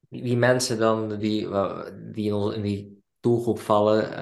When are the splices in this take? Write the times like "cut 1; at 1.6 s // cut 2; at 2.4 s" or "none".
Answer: cut 1; at 1.2 s